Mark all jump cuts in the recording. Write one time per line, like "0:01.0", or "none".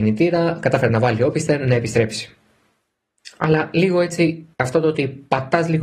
0:04.5